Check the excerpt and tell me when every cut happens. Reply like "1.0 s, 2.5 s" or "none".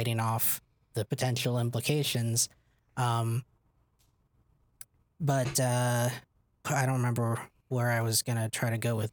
6.6 s